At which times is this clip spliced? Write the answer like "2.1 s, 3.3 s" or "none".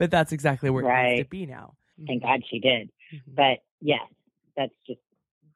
1.9 s